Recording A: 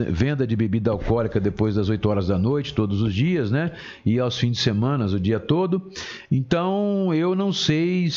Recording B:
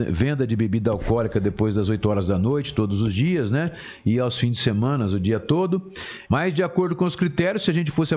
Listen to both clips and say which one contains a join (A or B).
B